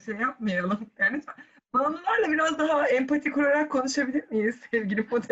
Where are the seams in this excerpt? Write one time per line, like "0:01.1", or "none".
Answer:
none